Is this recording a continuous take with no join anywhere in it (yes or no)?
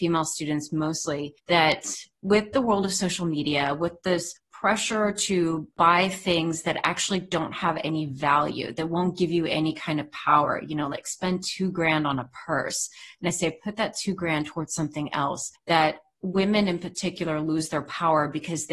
yes